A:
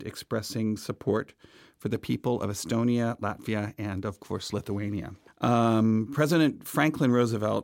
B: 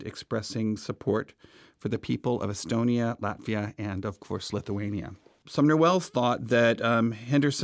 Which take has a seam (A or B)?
A